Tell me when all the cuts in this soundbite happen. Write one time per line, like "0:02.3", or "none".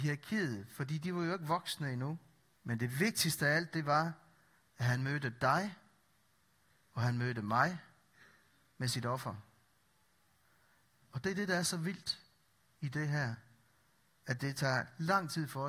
0:02.5
0:11.0